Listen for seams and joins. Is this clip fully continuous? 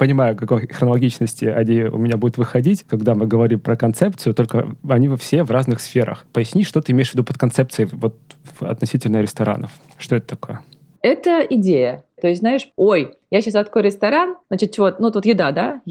no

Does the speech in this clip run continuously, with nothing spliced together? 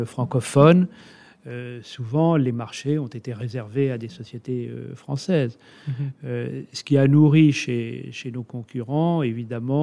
yes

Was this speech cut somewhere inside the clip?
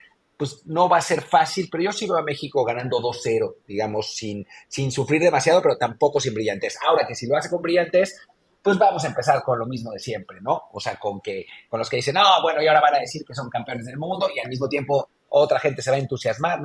no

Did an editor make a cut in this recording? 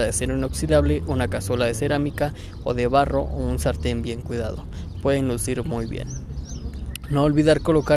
no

